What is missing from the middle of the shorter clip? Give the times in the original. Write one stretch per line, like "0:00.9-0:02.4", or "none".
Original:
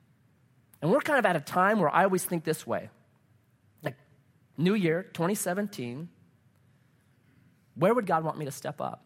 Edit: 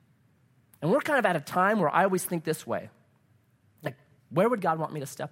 0:04.2-0:07.6